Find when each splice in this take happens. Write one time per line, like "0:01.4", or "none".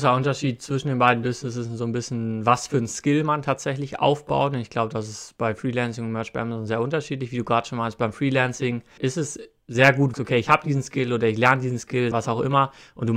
0:09.0
0:10.1
0:12.1